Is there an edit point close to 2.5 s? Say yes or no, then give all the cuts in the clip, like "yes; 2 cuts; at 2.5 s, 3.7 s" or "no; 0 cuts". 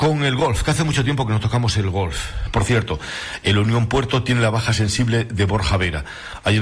yes; 1 cut; at 2.5 s